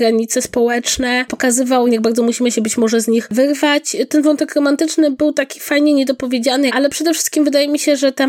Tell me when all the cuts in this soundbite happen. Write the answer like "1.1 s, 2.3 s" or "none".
1.9 s, 6.7 s

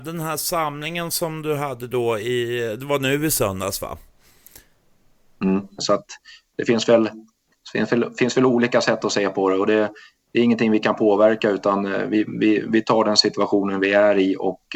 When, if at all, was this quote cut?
5.8 s

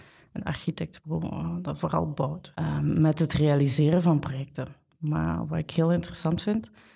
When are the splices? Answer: 2.5 s

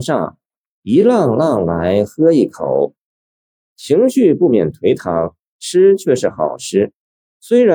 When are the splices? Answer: none

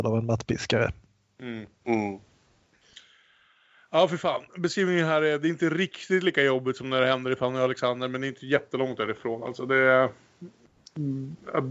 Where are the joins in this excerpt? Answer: none

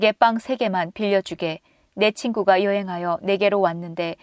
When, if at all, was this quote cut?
none

